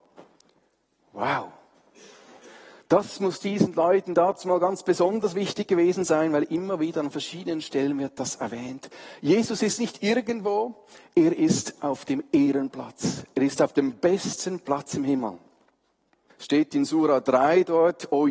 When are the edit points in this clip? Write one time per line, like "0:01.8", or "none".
0:16.3